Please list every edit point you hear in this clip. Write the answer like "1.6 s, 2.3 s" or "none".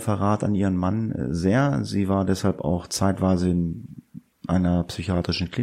none